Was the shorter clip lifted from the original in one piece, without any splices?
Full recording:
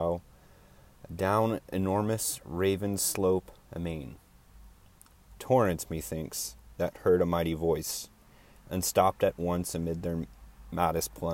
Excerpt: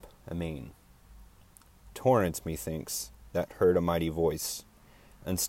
yes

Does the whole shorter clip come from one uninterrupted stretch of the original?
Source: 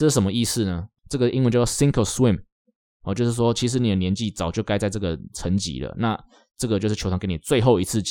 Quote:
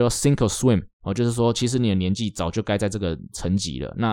no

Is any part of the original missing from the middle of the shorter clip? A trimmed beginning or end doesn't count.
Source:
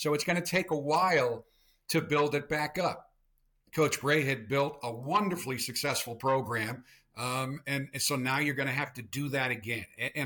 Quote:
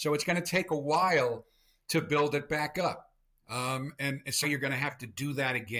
yes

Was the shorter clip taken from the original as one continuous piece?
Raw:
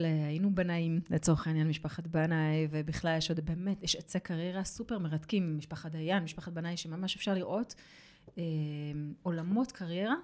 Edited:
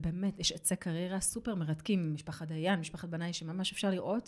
yes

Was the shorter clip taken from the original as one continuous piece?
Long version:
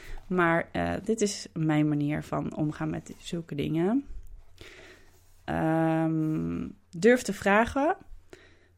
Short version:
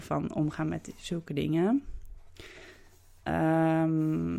yes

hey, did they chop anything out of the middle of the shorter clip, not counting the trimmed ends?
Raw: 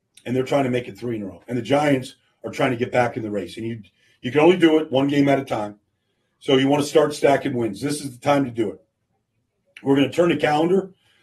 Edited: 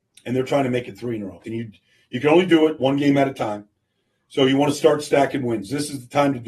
yes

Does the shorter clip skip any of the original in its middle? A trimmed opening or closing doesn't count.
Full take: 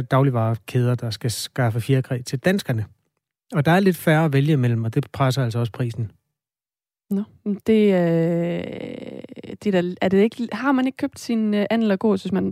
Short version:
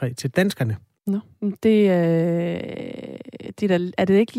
yes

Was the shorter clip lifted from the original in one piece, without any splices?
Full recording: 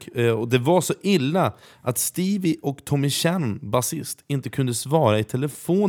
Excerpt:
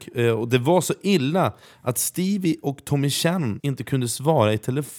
no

